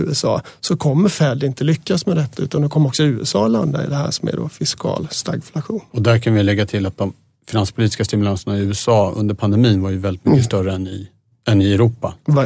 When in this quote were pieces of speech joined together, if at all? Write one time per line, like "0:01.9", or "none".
none

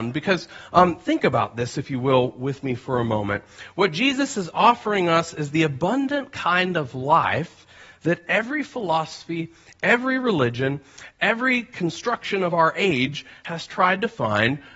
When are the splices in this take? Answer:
none

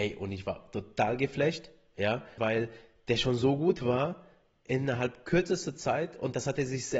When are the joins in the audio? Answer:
0:02.4

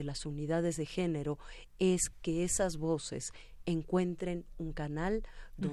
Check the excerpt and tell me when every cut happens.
none

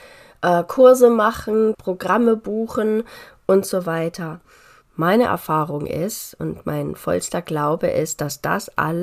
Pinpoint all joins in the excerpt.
0:01.7
0:04.8

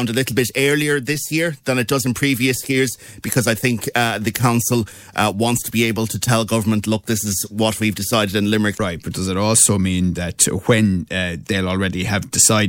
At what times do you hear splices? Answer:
0:08.7
0:11.4

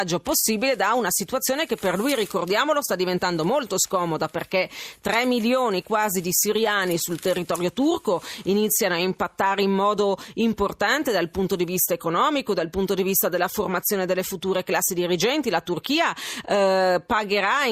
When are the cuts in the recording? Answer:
none

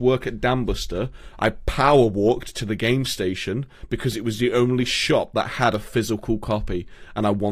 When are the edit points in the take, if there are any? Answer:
none

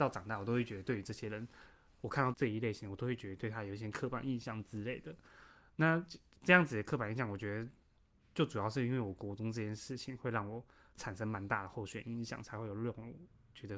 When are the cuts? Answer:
0:02.3

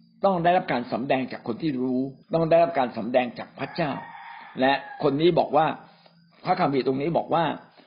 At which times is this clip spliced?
0:02.2

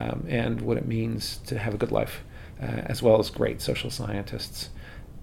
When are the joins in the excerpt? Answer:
none

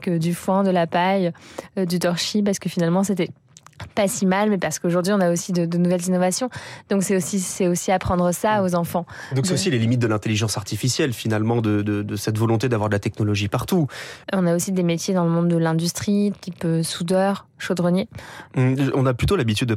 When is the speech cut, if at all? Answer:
0:14.2
0:18.5

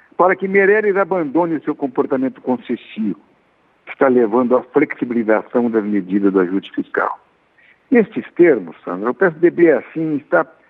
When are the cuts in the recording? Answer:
0:07.7

